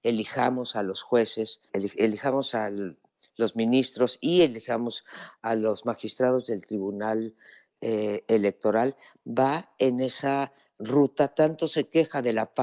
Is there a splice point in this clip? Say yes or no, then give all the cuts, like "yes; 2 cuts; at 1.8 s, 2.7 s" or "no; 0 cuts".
yes; 1 cut; at 1.7 s